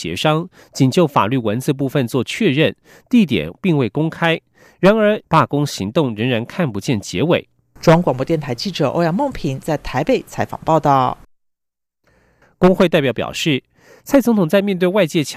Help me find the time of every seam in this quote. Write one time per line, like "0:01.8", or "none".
0:05.2
0:07.8
0:12.4